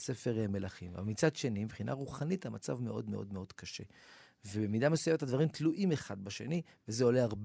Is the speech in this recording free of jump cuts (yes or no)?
yes